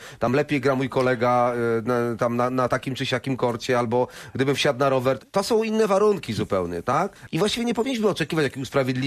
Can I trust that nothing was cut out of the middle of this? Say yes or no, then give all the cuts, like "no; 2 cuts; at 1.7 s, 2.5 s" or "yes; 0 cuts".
no; 1 cut; at 5.2 s